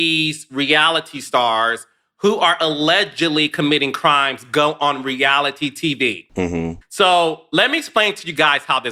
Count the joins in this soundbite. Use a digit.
1